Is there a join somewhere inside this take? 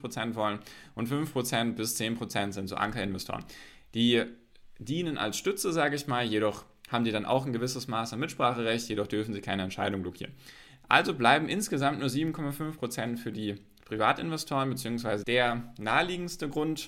yes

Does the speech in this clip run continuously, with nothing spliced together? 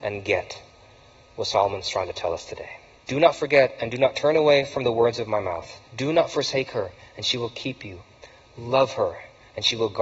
no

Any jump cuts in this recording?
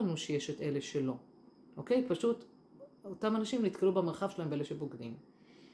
no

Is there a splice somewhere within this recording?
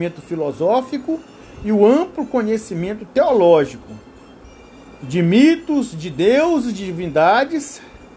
no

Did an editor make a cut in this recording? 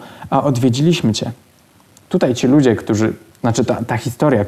no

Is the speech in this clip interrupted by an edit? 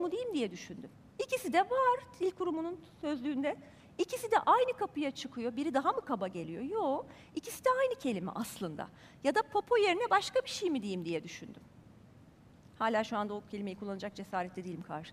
no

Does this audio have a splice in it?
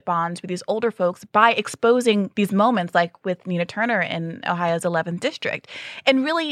no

